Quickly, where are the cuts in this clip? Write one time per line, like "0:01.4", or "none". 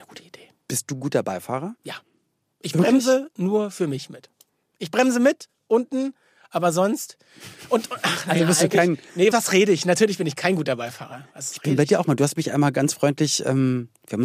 0:09.3